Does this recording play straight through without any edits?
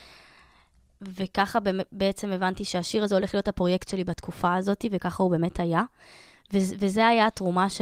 no; 1 cut; at 1.0 s

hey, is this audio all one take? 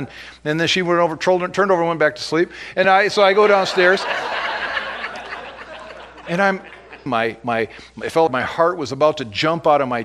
no; 3 cuts; at 2.8 s, 7.1 s, 8.3 s

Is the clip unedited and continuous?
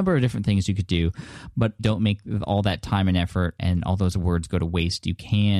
no; 2 cuts; at 1.8 s, 3.6 s

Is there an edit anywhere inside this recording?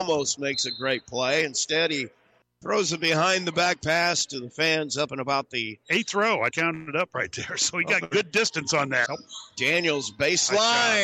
yes; 2 cuts; at 6.5 s, 9.1 s

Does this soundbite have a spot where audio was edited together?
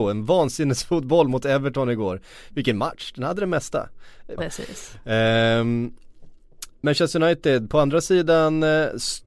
yes; 1 cut; at 4.4 s

